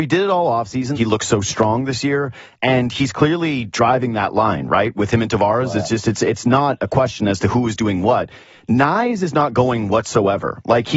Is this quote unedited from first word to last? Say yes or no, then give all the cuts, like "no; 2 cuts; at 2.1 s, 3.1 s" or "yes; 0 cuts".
no; 1 cut; at 1.0 s